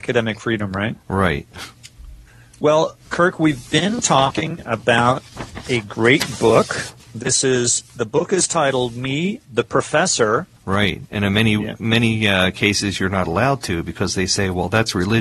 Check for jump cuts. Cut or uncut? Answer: cut